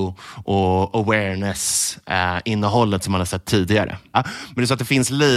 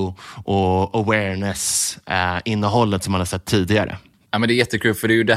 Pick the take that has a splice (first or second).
first